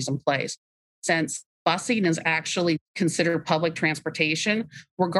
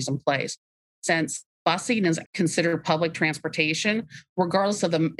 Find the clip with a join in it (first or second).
second